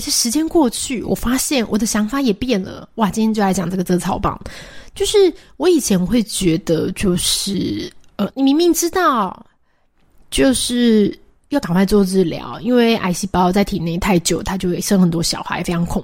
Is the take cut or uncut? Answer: uncut